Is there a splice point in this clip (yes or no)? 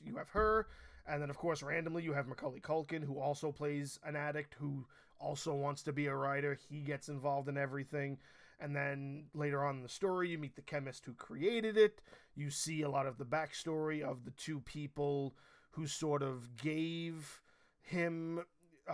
no